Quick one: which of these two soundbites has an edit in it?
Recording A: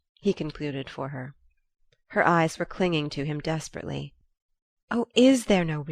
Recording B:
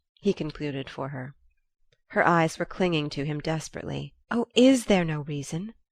B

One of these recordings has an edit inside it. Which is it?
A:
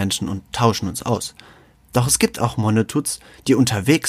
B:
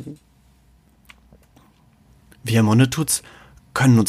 A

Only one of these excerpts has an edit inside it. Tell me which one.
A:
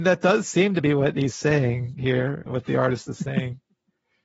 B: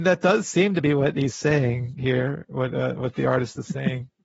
A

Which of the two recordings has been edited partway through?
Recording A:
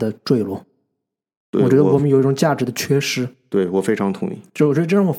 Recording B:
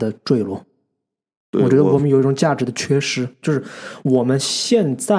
B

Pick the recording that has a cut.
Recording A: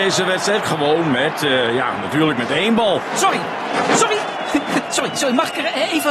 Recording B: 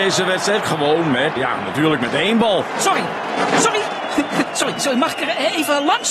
B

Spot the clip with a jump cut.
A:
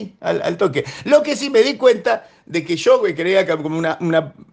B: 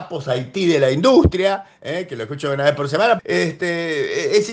B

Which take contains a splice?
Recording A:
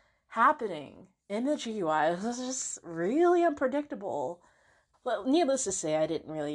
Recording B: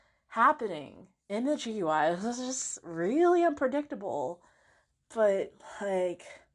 A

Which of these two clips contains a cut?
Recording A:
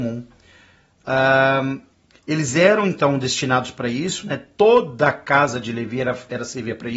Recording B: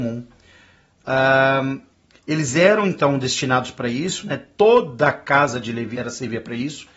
B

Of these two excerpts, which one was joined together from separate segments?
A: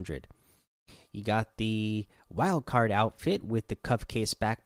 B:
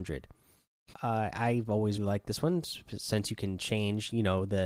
B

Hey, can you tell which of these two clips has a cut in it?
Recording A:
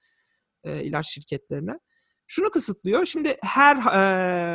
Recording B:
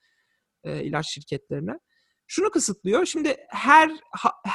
A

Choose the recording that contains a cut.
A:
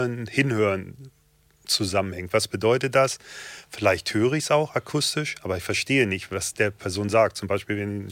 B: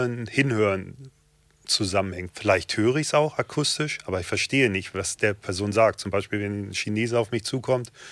B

